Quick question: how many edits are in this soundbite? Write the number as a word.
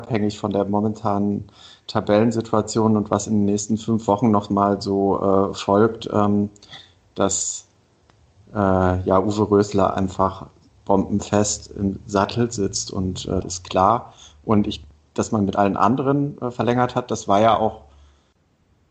one